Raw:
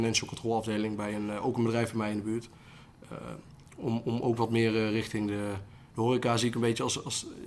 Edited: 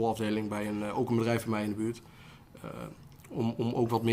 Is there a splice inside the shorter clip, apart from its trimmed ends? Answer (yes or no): no